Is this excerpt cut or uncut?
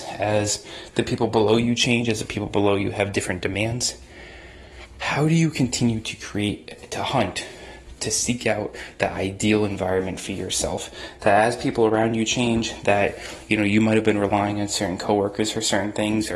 uncut